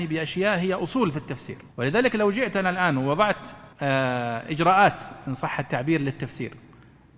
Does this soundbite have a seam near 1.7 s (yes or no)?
yes